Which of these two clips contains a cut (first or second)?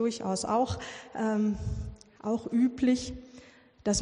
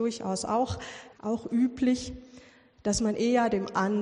second